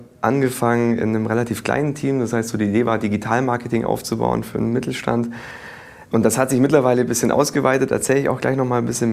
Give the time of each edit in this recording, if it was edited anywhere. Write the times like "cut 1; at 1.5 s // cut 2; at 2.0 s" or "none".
none